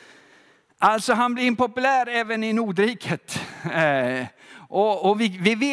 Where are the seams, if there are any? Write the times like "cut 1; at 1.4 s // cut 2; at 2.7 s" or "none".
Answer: none